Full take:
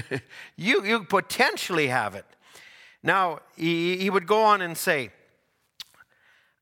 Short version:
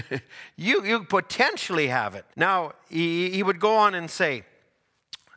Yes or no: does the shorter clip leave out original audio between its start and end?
yes